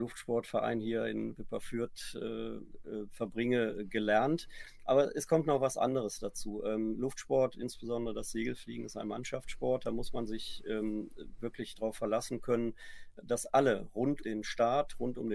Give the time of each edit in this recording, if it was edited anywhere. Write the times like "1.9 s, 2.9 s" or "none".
14.2 s